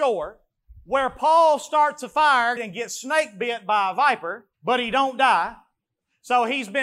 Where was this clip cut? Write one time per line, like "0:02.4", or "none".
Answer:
0:02.6
0:04.5